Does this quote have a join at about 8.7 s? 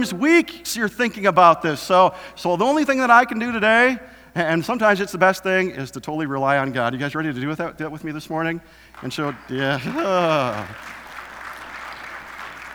no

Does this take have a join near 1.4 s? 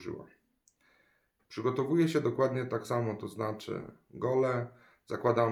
yes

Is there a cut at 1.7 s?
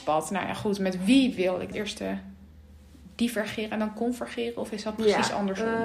yes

